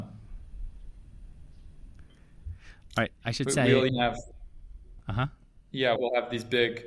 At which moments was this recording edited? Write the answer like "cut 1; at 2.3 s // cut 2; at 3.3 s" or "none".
cut 1; at 3.9 s // cut 2; at 6.0 s